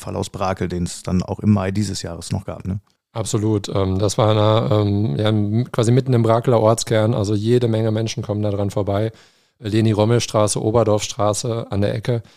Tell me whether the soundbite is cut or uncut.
uncut